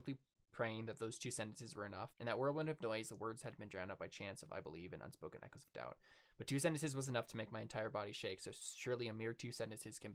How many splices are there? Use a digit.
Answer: 1